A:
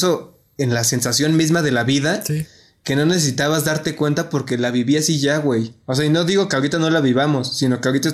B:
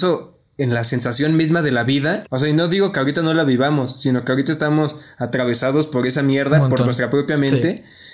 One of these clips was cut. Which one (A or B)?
B